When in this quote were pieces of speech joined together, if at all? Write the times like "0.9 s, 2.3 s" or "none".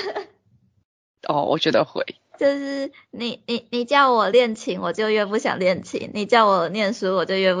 2.3 s